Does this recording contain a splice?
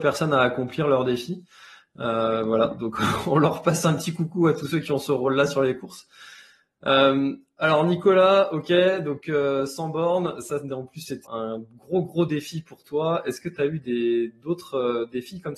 yes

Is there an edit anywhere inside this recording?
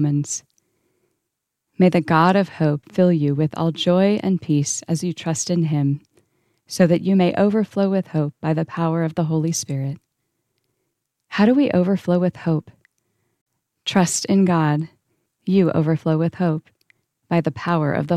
yes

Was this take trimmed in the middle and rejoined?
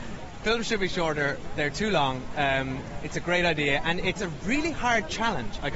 no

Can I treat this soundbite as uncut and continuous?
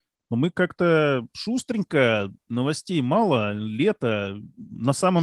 yes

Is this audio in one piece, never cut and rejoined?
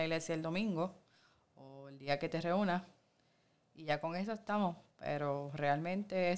yes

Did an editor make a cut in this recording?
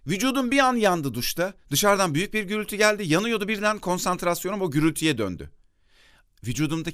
no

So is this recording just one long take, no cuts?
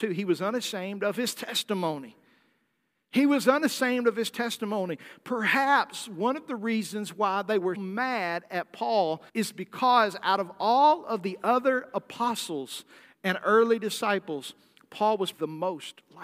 no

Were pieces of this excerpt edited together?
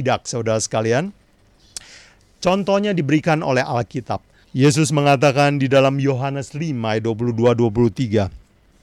yes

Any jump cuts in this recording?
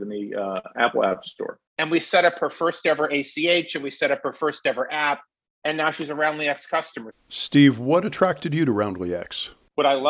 yes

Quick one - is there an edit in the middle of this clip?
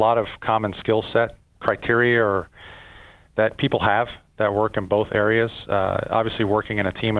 no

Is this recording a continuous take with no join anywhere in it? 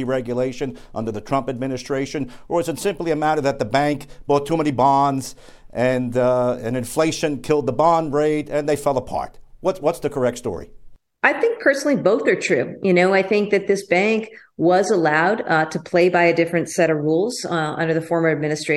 yes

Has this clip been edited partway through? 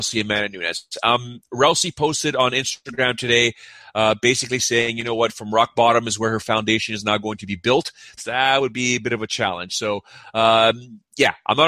yes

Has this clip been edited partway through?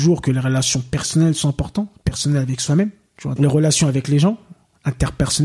yes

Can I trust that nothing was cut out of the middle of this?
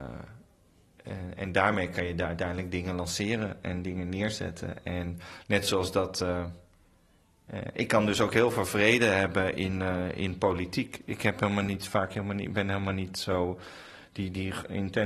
yes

